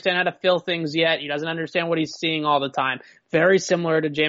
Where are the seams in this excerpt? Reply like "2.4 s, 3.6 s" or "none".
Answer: none